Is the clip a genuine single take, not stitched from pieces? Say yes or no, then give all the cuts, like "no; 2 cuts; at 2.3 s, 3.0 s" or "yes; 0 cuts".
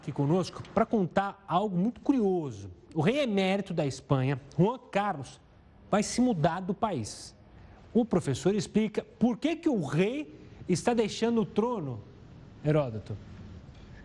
yes; 0 cuts